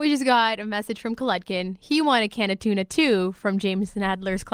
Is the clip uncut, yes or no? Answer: yes